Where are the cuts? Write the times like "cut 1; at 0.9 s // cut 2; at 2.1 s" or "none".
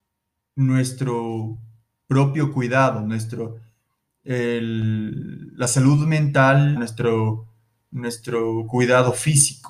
cut 1; at 6.8 s